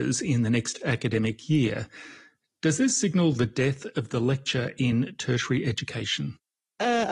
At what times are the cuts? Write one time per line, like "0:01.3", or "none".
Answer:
none